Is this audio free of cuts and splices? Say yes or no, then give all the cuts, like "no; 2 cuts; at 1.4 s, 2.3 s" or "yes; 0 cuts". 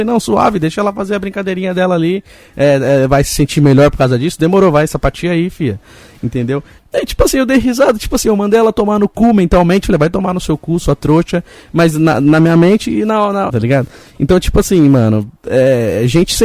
no; 2 cuts; at 6.8 s, 13.5 s